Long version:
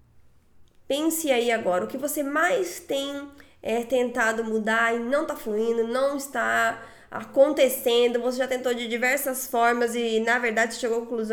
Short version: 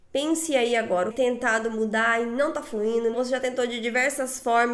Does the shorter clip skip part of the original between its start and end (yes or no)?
yes